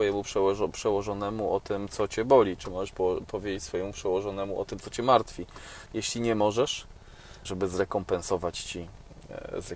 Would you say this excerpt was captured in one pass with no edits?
no; 2 cuts; at 5.9 s, 7.4 s

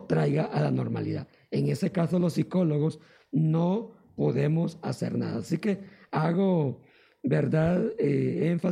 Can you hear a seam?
no; 0 cuts

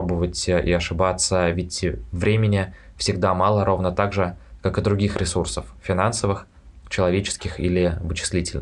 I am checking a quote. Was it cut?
no; 0 cuts

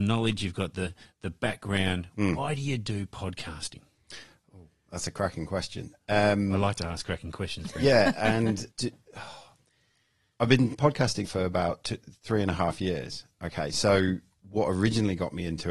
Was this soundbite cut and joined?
yes; 2 cuts; at 8.7 s, 11.2 s

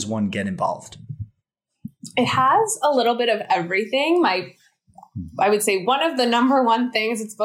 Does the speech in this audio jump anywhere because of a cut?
no; 0 cuts

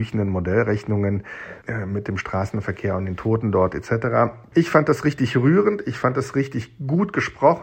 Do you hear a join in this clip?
no; 0 cuts

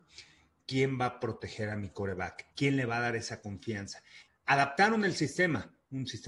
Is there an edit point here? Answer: yes; 2 cuts; at 2.5 s, 4.3 s

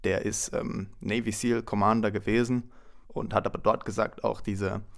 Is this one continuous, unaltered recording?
no; 1 cut; at 3.0 s

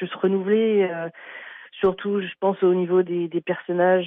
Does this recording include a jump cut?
no; 0 cuts

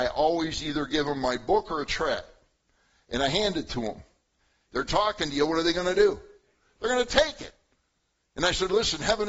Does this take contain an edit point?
yes; 1 cut; at 4.7 s

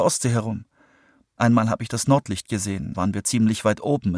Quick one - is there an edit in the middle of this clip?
yes; 2 cuts; at 1.2 s, 2.9 s

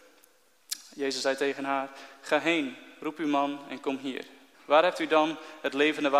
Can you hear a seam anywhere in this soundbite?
yes; 1 cut; at 4.5 s

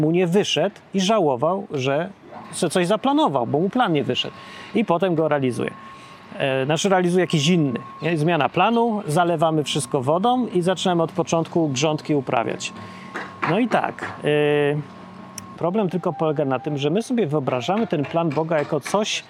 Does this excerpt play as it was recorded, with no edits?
no; 1 cut; at 15.5 s

